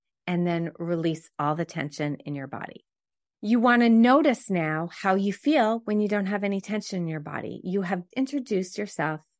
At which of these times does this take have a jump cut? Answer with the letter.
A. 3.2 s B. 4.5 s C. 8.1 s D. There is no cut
C